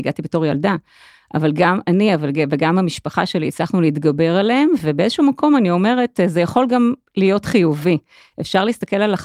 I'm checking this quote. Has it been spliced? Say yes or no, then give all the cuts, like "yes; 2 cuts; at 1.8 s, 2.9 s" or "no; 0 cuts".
no; 0 cuts